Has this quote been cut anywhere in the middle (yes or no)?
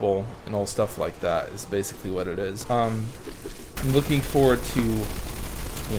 yes